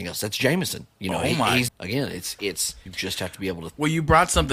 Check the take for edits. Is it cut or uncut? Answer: cut